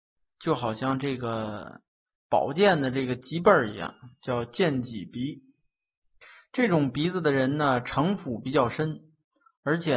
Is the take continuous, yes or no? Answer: yes